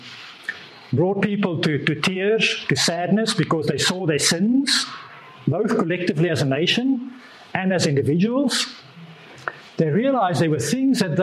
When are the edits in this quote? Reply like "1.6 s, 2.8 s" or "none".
none